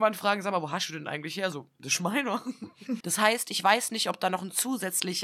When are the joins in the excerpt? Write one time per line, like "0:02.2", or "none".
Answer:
0:03.0